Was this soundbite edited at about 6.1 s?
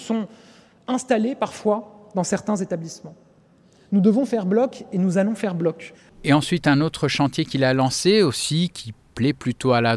yes; 1 cut; at 6.1 s

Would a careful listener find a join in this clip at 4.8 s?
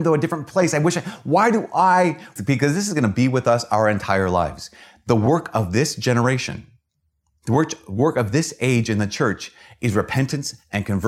no; 1 cut; at 2.4 s

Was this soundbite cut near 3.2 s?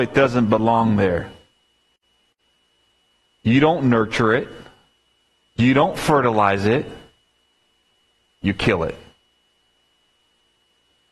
yes; 1 cut; at 3.2 s

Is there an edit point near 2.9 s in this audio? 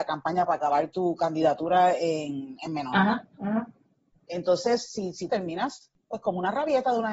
no; 1 cut; at 5.3 s

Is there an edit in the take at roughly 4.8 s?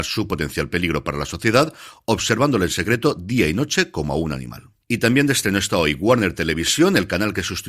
no; 0 cuts

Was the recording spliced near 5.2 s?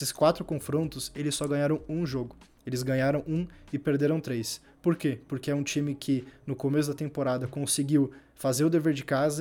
no; 0 cuts

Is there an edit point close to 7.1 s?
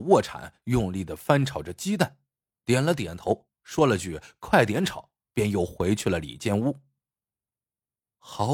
no; 0 cuts

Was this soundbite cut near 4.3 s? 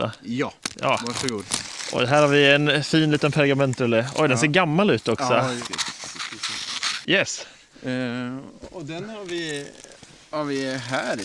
no; 1 cut; at 7.0 s

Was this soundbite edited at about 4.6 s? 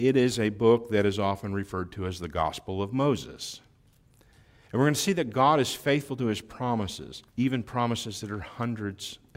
yes; 2 cuts; at 4.6 s, 7.3 s

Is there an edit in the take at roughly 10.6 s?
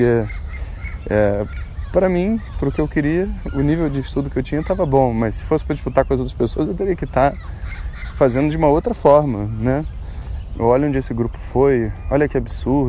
yes; 1 cut; at 10.6 s

